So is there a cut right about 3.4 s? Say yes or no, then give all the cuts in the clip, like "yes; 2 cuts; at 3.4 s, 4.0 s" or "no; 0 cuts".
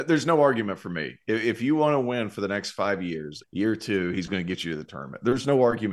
yes; 1 cut; at 3.4 s